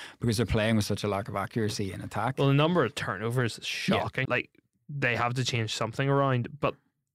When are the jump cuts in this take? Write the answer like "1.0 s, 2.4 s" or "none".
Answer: 4.2 s

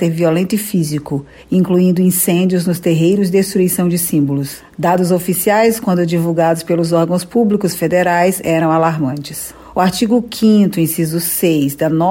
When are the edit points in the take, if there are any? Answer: 9.7 s

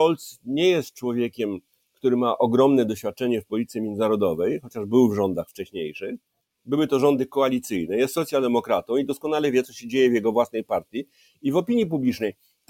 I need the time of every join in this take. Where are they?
none

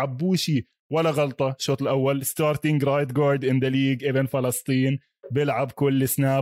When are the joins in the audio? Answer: none

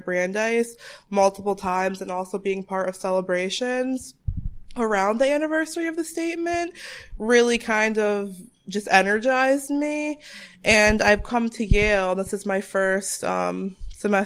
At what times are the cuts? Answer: none

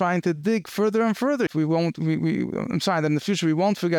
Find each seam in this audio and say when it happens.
1.5 s

